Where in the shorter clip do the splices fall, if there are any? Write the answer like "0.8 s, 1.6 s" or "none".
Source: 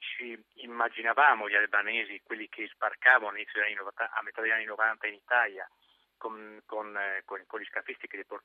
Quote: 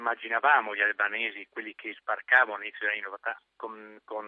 3.4 s